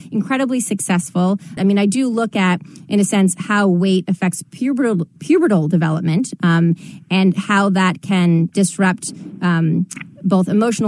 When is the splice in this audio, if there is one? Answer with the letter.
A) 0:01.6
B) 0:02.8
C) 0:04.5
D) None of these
A